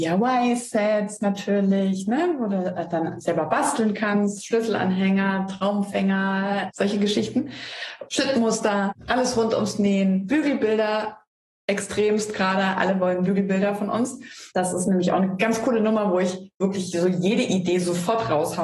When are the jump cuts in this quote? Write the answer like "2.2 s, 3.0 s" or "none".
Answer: none